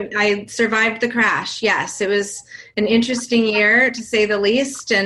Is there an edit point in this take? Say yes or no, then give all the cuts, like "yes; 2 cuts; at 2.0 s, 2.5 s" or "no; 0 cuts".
no; 0 cuts